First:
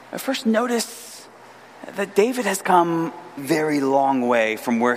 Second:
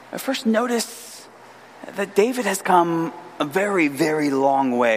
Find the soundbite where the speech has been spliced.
first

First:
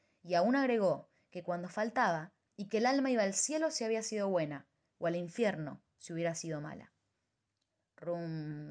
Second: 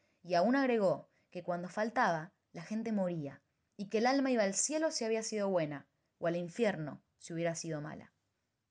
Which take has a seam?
first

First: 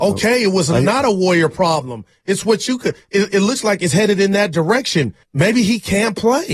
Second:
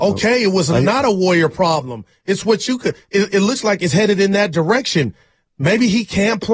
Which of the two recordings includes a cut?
first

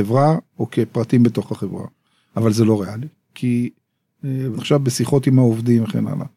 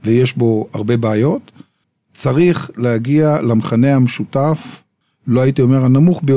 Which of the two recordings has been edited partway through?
first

